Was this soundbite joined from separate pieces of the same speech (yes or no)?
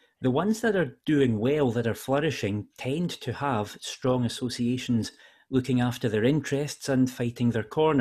no